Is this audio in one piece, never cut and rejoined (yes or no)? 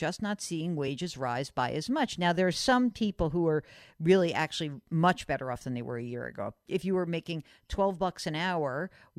yes